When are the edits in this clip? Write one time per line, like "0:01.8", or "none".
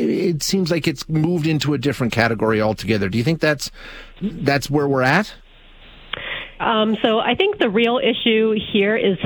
0:06.6